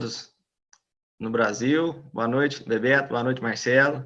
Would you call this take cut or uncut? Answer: uncut